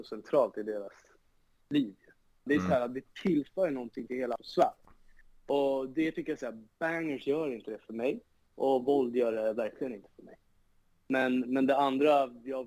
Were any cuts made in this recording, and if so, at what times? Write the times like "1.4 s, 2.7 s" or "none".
2.5 s